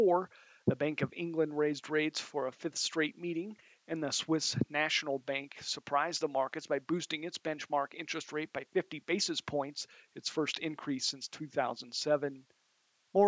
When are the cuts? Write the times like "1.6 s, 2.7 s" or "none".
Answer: none